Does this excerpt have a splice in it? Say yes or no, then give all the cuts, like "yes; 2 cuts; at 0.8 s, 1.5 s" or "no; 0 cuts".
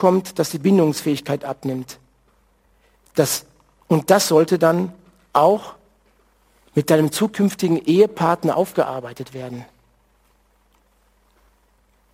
no; 0 cuts